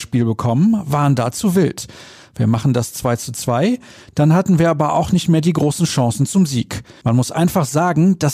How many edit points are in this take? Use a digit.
1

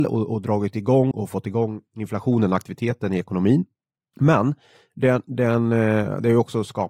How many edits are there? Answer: 1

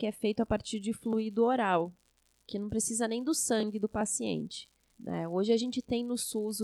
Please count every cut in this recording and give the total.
1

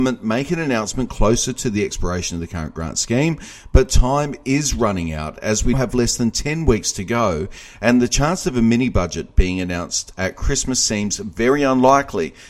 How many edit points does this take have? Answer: 1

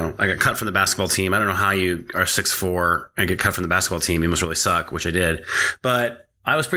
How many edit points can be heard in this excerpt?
0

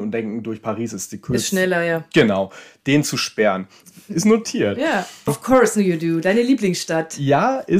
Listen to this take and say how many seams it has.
2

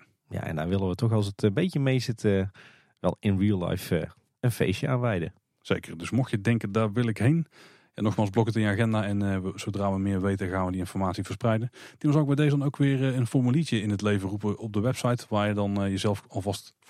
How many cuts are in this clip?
0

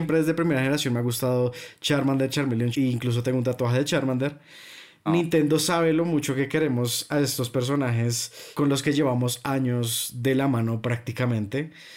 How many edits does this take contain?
2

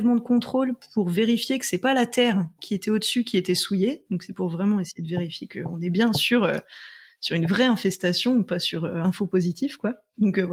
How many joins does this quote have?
0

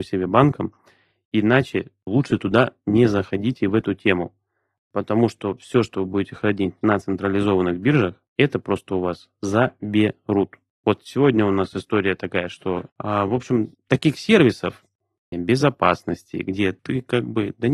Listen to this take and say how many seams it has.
2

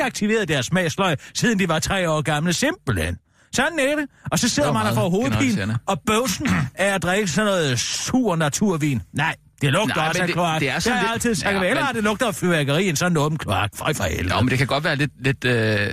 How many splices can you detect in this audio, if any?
0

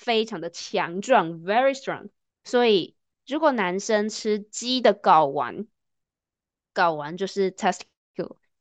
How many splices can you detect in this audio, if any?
1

